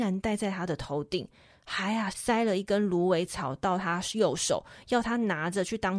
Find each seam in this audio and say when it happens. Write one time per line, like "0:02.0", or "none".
0:02.1